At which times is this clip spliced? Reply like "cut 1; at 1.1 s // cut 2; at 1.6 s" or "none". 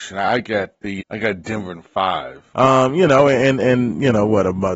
cut 1; at 1.0 s // cut 2; at 2.5 s